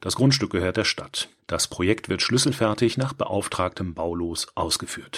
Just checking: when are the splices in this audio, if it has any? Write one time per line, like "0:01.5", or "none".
0:01.4